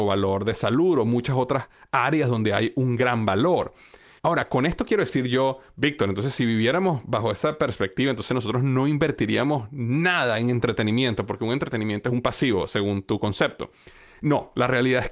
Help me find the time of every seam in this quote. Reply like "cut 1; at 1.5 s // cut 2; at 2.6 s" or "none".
none